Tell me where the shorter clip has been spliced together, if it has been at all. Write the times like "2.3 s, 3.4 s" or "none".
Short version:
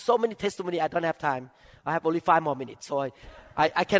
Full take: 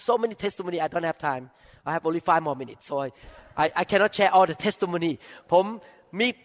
none